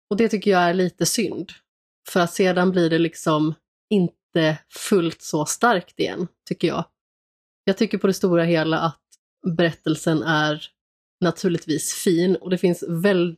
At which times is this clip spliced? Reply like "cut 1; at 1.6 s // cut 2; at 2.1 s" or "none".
none